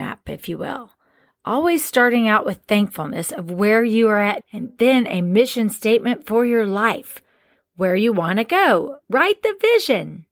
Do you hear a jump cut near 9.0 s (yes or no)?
no